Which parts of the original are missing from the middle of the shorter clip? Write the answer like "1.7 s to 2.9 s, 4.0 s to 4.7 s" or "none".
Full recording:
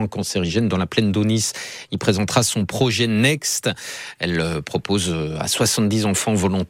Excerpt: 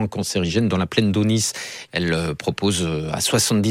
1.9 s to 4.1 s